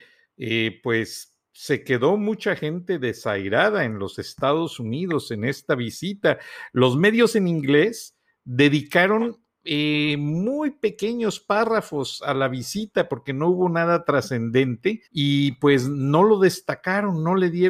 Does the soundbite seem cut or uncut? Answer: cut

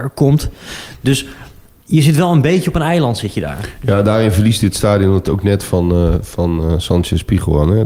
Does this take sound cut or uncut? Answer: uncut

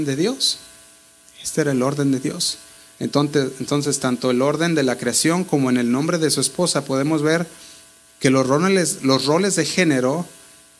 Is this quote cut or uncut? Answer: uncut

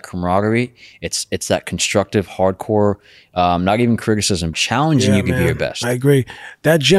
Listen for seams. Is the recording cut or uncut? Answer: cut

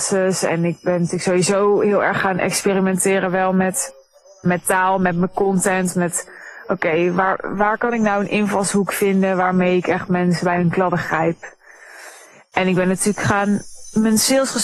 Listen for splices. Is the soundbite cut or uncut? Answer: uncut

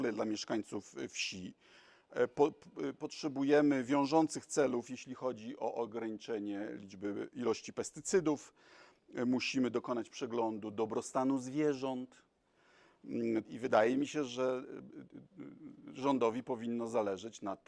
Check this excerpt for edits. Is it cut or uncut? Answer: cut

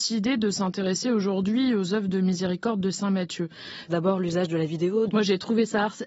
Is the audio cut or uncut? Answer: cut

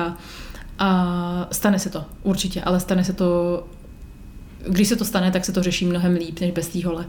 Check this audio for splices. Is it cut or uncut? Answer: uncut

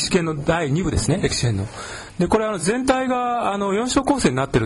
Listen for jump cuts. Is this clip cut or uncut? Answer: uncut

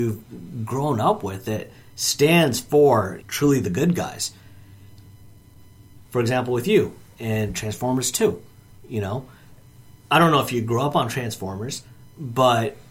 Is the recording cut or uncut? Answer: cut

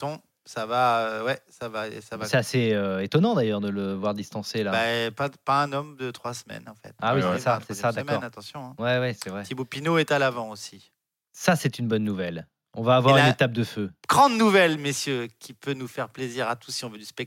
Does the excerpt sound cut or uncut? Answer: uncut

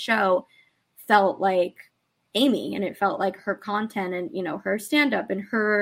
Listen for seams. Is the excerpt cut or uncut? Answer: uncut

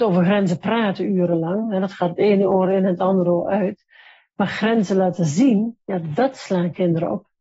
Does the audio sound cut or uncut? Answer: uncut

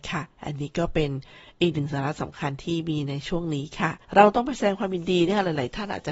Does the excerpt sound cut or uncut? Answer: cut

